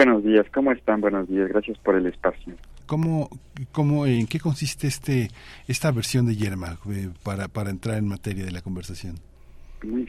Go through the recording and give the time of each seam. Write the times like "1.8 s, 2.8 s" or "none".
2.8 s